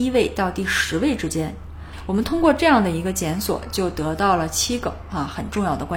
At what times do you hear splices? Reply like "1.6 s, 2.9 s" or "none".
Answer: none